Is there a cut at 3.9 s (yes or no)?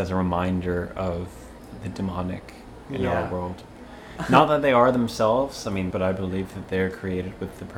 no